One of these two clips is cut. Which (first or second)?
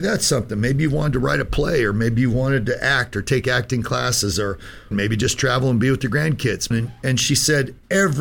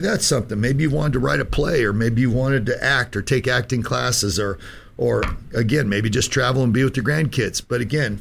first